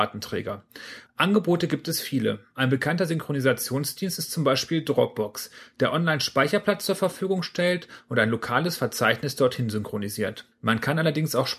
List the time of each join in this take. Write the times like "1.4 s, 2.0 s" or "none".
1.1 s